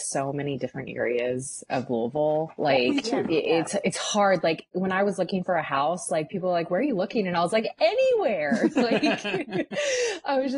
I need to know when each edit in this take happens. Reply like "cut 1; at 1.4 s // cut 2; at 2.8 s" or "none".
none